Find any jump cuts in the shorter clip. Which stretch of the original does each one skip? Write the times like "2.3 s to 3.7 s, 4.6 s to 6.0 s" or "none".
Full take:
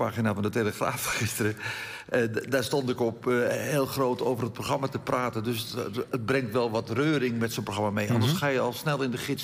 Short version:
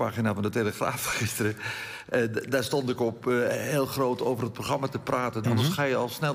5.4 s to 8.1 s